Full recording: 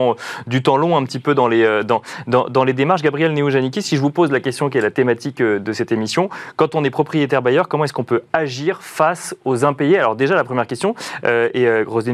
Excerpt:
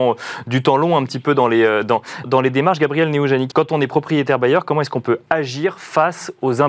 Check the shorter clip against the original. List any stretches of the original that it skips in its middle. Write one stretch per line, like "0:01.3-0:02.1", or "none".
0:02.2-0:02.5
0:03.7-0:06.5